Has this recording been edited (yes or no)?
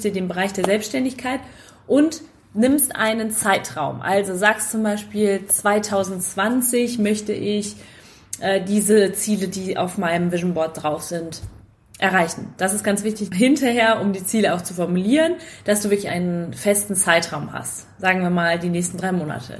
no